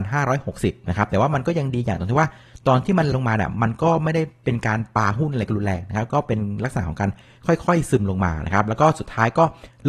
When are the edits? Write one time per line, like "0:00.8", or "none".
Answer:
0:03.1